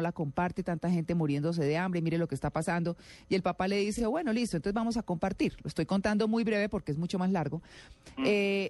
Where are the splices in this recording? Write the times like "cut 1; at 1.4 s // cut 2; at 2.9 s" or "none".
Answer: none